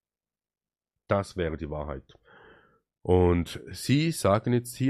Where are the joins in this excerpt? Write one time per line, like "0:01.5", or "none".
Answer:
none

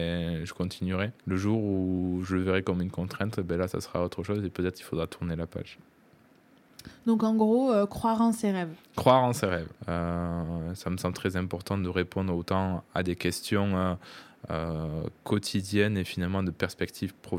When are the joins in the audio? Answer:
0:01.2
0:09.7

